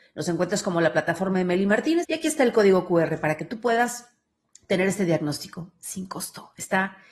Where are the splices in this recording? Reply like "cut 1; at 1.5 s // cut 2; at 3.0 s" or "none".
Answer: cut 1; at 2.0 s